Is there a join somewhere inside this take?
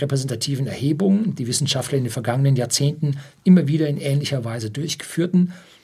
no; 0 cuts

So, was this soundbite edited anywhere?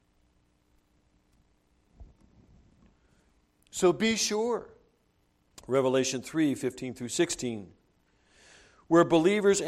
yes; 1 cut; at 5.5 s

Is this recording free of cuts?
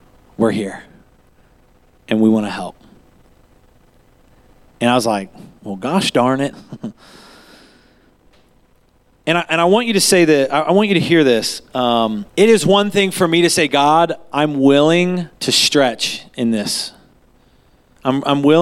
no; 3 cuts; at 6.5 s, 12.3 s, 15.4 s

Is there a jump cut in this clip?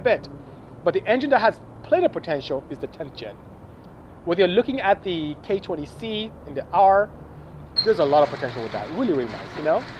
yes; 1 cut; at 7.8 s

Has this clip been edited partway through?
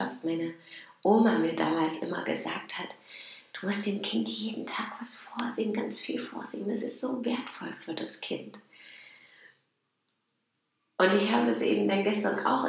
no; 0 cuts

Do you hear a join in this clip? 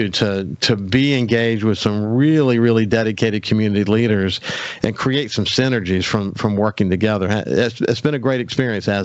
no; 0 cuts

